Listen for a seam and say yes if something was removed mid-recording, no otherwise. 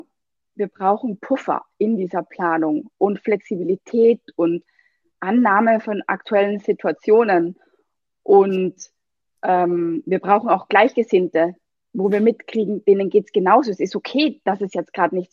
no